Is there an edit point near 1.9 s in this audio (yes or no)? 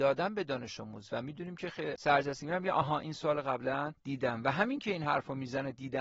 yes